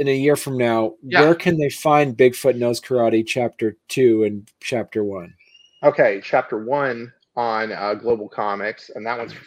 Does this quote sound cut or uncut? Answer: cut